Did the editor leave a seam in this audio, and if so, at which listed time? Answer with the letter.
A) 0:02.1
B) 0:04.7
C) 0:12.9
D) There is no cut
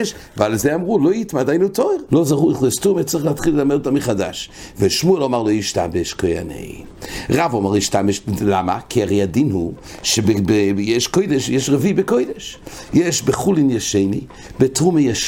A